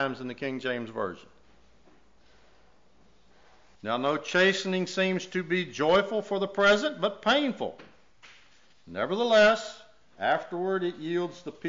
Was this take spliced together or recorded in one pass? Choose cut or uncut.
cut